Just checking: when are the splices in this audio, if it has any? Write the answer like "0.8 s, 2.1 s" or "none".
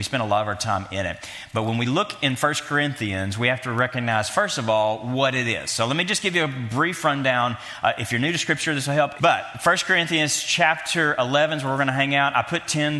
9.2 s